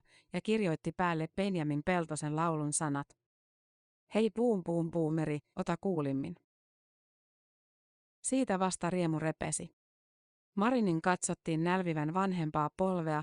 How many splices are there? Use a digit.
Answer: 1